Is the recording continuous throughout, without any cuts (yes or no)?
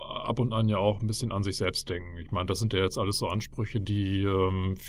yes